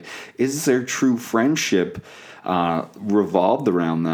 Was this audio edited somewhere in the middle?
no; 0 cuts

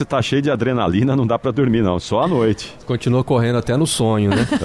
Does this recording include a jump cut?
no; 0 cuts

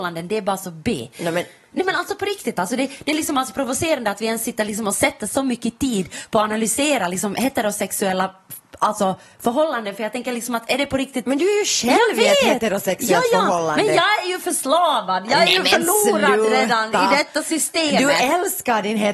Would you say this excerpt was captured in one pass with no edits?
yes; 0 cuts

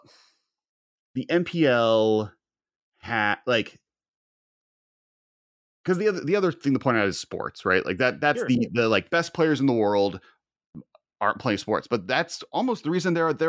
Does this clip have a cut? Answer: no; 0 cuts

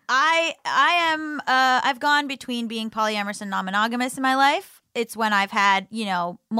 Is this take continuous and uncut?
no; 1 cut; at 4.8 s

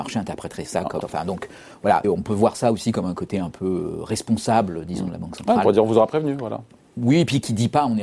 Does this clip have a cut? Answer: yes; 2 cuts; at 1.0 s, 2.0 s

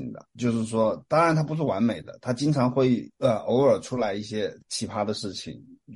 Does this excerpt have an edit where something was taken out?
yes; 1 cut; at 3.1 s

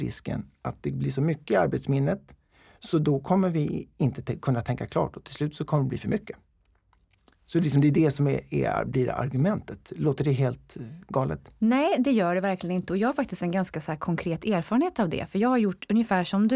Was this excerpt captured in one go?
yes; 0 cuts

